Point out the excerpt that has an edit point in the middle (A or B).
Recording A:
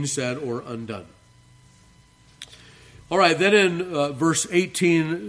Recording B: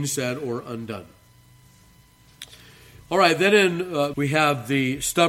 B